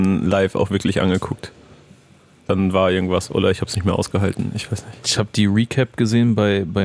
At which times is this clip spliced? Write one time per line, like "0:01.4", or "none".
0:05.0